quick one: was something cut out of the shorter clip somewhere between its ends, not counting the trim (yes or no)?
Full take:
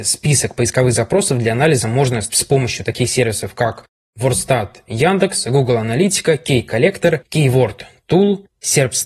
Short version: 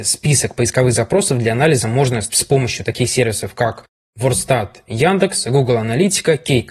no